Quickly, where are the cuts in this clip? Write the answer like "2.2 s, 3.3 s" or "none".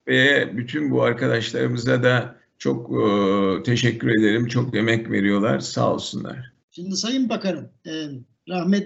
6.6 s